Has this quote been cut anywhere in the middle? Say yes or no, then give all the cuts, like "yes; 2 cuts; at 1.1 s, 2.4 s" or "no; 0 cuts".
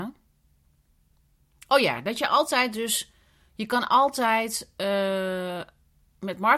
no; 0 cuts